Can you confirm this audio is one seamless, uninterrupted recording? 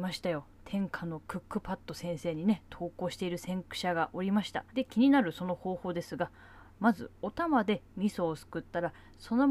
no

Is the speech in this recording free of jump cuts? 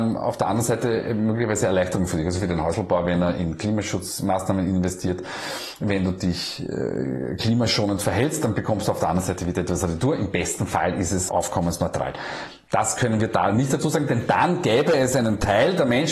no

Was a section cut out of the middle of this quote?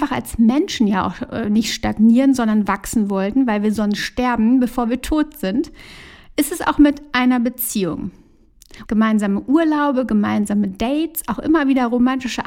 yes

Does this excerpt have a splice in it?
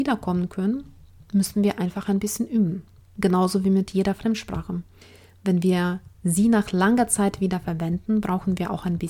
no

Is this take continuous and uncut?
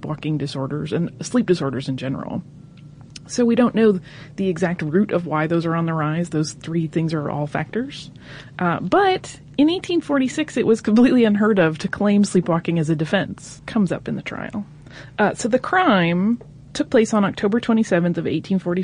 no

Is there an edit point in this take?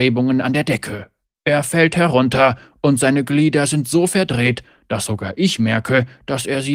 no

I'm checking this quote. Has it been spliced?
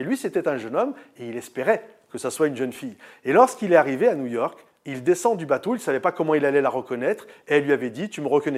no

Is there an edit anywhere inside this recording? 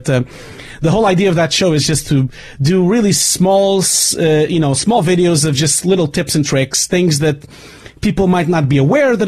no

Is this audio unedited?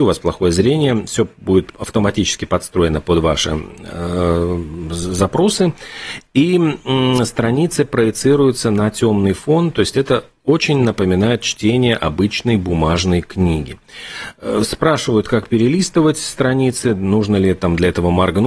yes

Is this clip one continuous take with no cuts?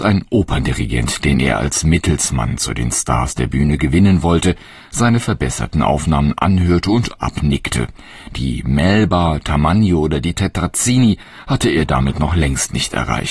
yes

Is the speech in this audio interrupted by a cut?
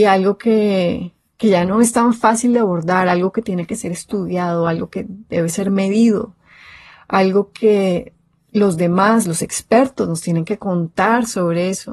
no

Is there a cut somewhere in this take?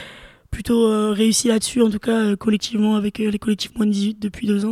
no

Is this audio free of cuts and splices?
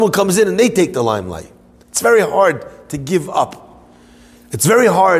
yes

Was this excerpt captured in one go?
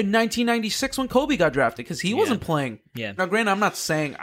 no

